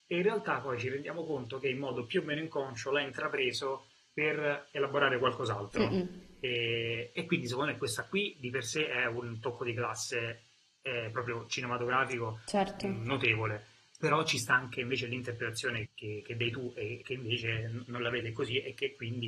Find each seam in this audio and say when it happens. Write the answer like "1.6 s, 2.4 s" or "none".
15.9 s, 17.0 s